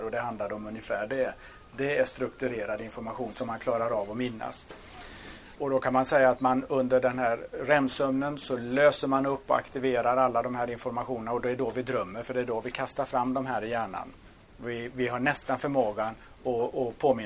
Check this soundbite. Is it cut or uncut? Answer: cut